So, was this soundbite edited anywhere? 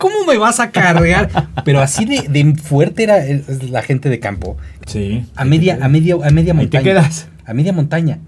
yes; 1 cut; at 4.8 s

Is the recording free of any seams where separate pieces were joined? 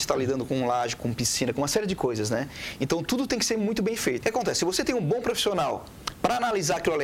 no; 2 cuts; at 1.0 s, 4.2 s

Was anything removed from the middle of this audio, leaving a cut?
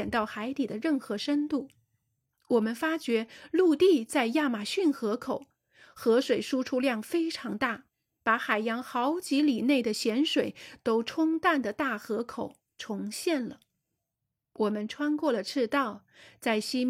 yes; 1 cut; at 2.3 s

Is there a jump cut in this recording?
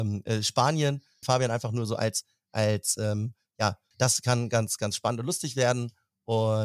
yes; 2 cuts; at 1.2 s, 3.9 s

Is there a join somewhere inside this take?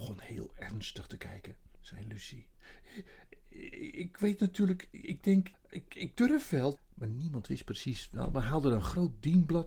yes; 3 cuts; at 1.7 s, 5.5 s, 6.8 s

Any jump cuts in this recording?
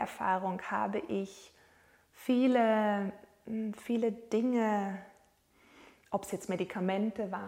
no; 0 cuts

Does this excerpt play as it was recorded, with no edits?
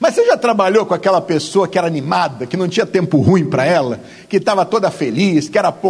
yes; 0 cuts

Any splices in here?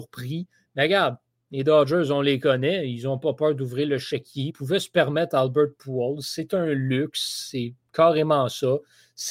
no; 0 cuts

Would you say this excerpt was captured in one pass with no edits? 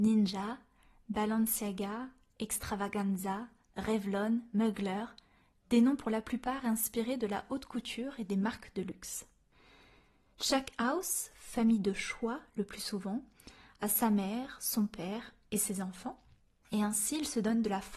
yes; 0 cuts

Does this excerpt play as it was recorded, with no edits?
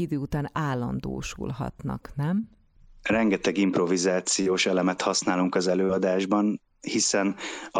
yes; 0 cuts

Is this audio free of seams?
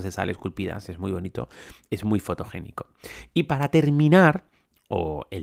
yes; 0 cuts

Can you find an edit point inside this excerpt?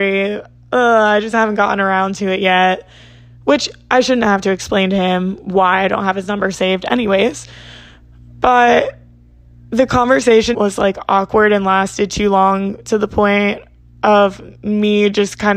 yes; 1 cut; at 10.5 s

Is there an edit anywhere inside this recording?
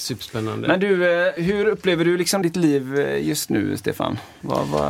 yes; 2 cuts; at 1.4 s, 2.4 s

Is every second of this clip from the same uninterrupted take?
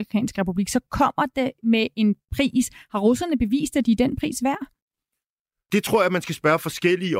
yes; 0 cuts

